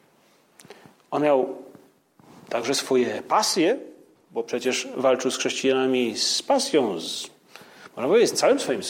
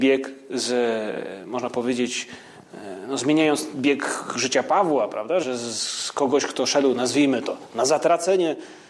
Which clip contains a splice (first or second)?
second